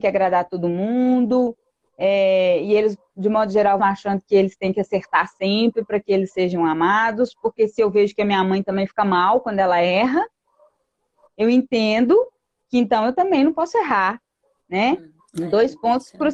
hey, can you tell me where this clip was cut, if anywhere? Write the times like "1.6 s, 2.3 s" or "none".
3.8 s, 15.2 s